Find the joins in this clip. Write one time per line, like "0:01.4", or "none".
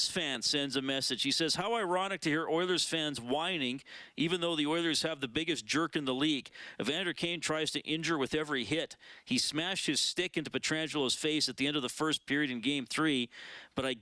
none